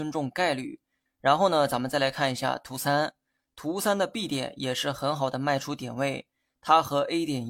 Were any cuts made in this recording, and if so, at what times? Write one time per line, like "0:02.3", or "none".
0:01.1